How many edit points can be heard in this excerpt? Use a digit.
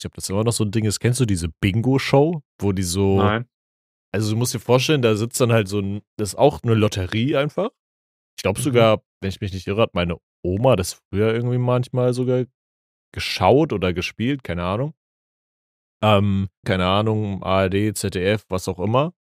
2